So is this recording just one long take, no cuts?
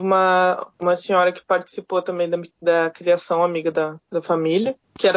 yes; 0 cuts

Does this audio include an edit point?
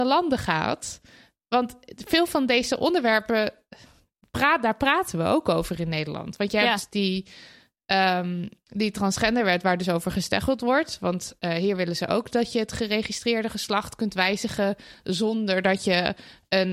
no; 0 cuts

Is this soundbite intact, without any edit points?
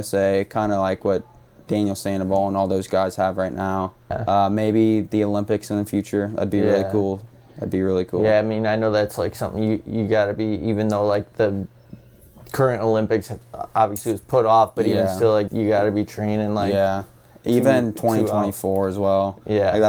no; 1 cut; at 15.5 s

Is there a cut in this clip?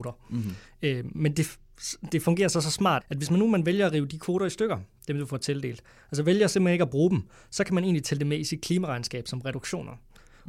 yes; 1 cut; at 3.0 s

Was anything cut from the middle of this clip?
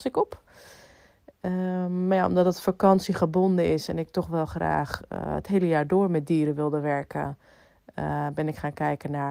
no; 0 cuts

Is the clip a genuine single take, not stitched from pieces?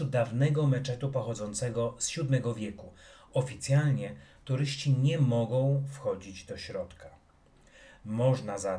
yes; 0 cuts

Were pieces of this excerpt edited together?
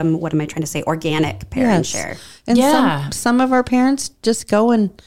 no; 0 cuts

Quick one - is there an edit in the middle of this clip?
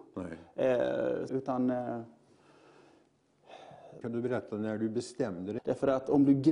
yes; 3 cuts; at 1.3 s, 4.0 s, 5.6 s

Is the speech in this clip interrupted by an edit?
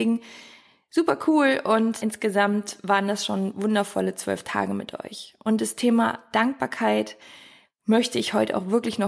yes; 1 cut; at 2.0 s

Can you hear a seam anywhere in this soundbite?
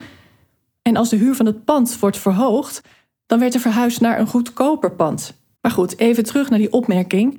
yes; 1 cut; at 5.6 s

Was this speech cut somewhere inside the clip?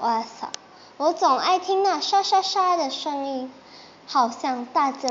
no; 0 cuts

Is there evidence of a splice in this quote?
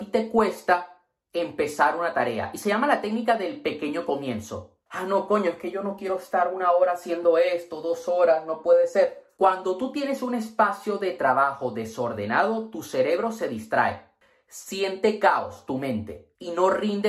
yes; 2 cuts; at 4.9 s, 9.4 s

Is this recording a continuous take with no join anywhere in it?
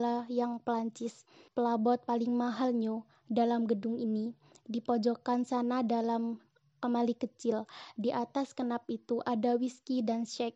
no; 1 cut; at 1.5 s

